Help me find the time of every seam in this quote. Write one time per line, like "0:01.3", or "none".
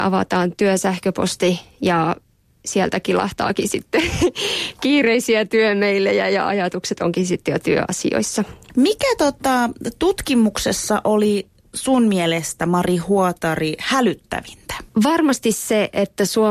none